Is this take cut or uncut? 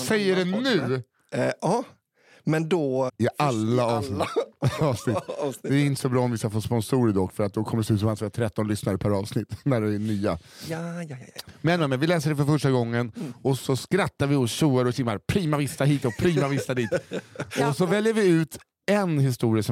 cut